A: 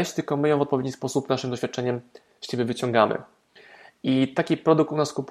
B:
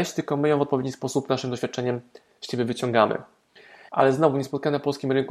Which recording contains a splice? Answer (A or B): B